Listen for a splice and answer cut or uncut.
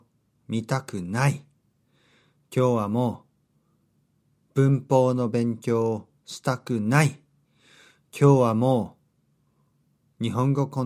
uncut